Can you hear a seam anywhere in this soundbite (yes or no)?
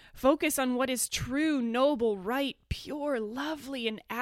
no